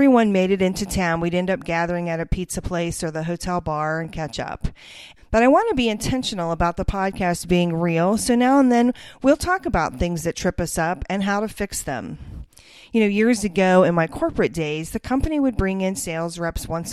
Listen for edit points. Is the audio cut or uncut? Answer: cut